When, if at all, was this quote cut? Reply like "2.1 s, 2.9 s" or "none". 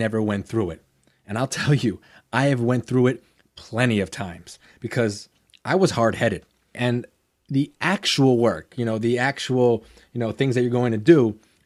6.7 s